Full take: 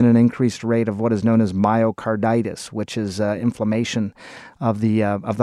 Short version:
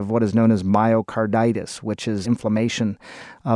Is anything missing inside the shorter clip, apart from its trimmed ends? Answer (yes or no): yes